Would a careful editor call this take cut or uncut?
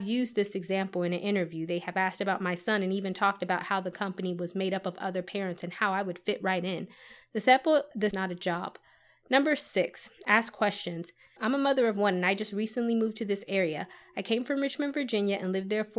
cut